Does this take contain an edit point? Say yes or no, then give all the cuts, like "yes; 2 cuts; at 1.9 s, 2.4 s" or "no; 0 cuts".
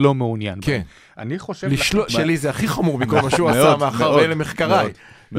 yes; 1 cut; at 2.1 s